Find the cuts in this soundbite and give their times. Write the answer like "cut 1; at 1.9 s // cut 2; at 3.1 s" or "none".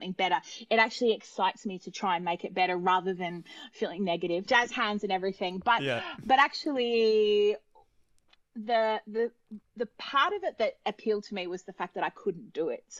cut 1; at 4.5 s

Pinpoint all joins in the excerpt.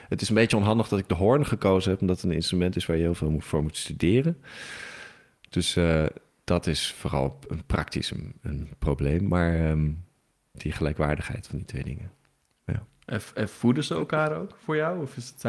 cut 1; at 10.4 s

